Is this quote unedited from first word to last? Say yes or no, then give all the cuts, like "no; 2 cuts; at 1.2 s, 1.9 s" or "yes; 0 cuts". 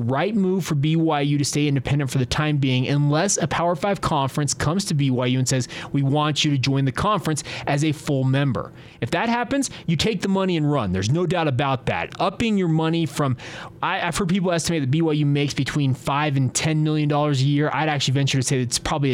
yes; 0 cuts